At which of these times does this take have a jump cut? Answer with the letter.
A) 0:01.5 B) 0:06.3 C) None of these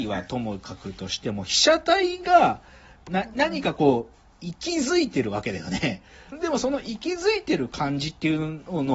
B